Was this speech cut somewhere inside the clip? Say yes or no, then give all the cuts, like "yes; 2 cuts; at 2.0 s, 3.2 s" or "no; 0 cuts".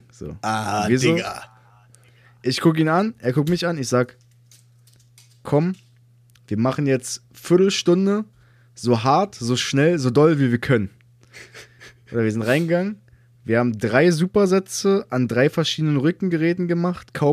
no; 0 cuts